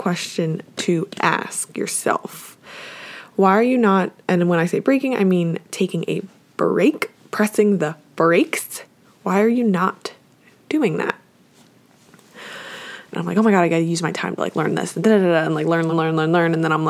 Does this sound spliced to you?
yes; 2 cuts; at 13.1 s, 15.9 s

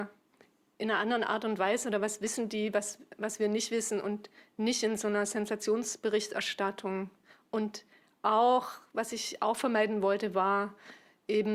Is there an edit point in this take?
no; 0 cuts

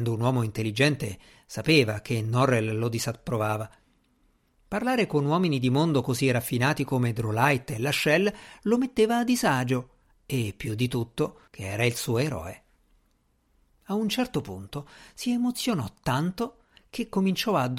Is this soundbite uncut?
no; 1 cut; at 11.5 s

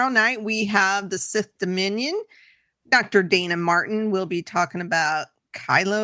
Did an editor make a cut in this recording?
no; 0 cuts

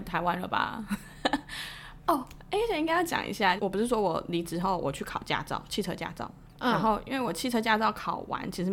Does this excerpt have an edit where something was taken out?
yes; 1 cut; at 3.6 s

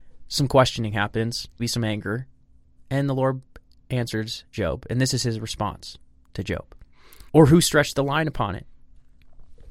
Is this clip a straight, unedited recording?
no; 2 cuts; at 1.6 s, 7.3 s

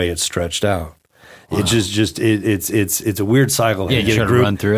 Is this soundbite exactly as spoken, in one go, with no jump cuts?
no; 1 cut; at 3.9 s

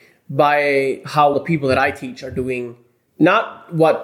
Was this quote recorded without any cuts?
no; 1 cut; at 1.3 s

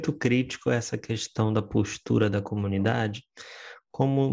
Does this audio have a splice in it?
no; 0 cuts

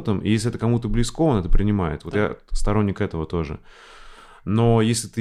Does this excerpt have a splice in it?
no; 0 cuts

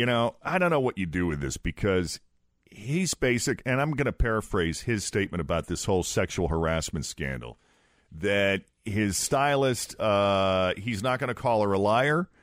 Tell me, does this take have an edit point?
no; 0 cuts

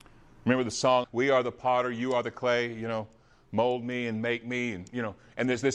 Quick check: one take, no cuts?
no; 1 cut; at 1.0 s

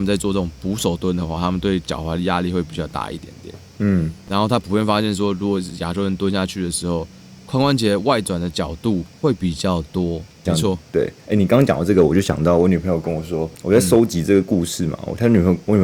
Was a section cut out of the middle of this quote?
yes; 1 cut; at 10.5 s

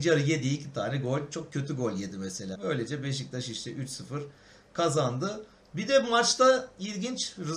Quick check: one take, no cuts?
no; 1 cut; at 2.5 s

